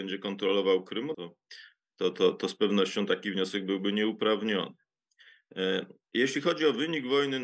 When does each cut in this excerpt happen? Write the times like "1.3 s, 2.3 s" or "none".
1.1 s

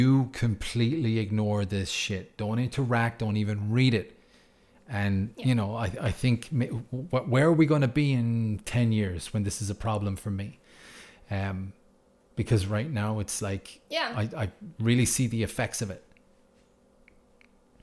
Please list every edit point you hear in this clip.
none

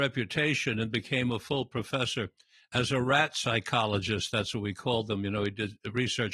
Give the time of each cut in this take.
none

